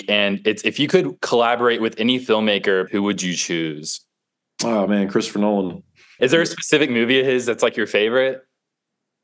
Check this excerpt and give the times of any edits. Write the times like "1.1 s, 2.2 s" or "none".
2.9 s, 6.2 s

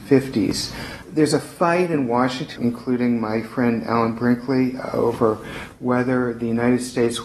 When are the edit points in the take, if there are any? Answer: 2.6 s

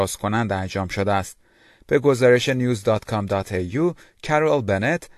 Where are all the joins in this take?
none

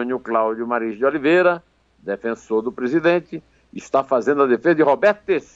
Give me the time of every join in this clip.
none

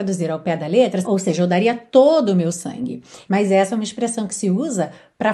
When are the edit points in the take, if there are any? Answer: 1.0 s, 3.3 s

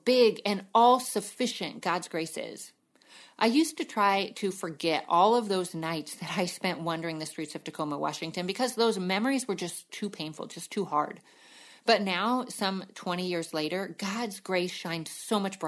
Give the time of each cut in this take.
none

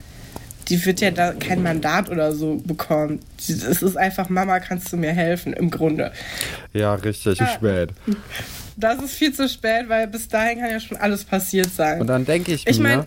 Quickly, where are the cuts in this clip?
7.4 s

